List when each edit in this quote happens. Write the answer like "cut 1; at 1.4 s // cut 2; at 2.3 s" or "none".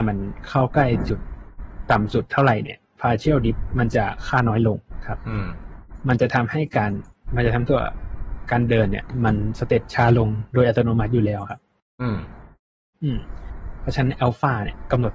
none

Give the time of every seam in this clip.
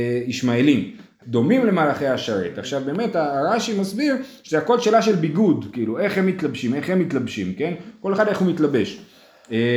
cut 1; at 1.2 s

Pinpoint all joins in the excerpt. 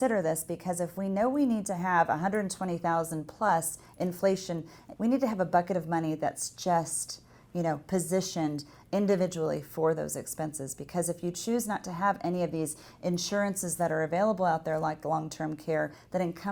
cut 1; at 5.0 s

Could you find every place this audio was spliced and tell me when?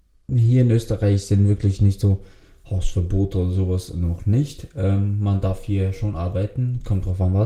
none

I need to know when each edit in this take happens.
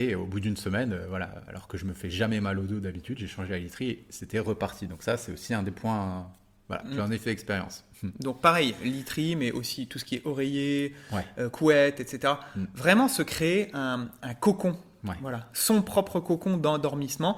none

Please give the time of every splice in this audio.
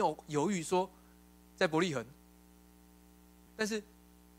cut 1; at 3.5 s

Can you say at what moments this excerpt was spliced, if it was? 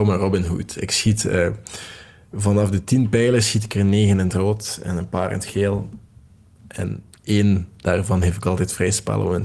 none

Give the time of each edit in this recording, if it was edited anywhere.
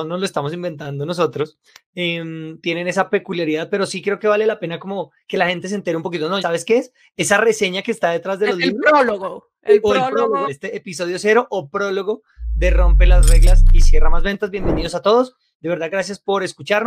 cut 1; at 6.4 s // cut 2; at 10.5 s

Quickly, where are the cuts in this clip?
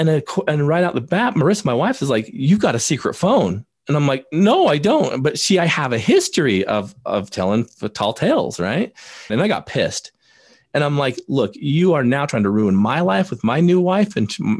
cut 1; at 9.3 s

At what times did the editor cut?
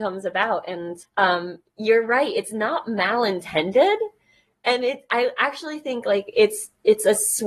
cut 1; at 1.0 s

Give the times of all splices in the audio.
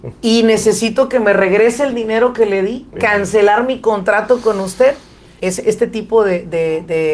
cut 1; at 3.0 s // cut 2; at 5.4 s

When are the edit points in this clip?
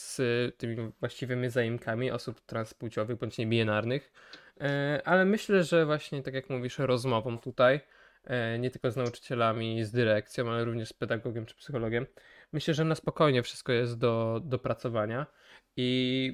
none

